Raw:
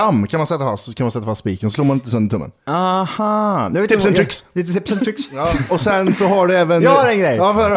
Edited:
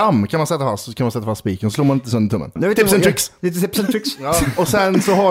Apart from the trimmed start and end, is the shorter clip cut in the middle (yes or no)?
yes